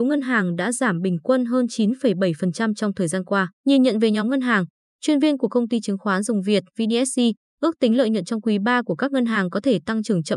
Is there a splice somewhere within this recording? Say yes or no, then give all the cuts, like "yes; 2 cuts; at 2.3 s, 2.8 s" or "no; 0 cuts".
yes; 2 cuts; at 3.6 s, 6.7 s